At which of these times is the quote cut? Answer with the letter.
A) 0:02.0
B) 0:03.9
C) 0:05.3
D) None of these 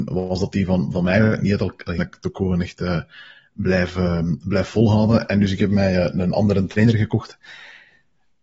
A